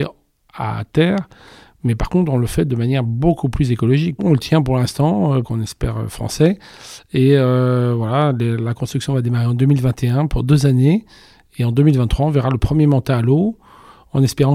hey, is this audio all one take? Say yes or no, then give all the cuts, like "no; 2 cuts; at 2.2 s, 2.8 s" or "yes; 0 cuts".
no; 2 cuts; at 4.2 s, 5.4 s